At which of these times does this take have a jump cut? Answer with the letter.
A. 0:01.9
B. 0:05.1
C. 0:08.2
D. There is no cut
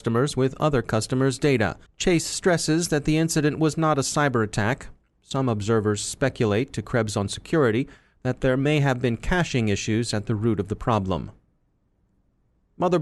A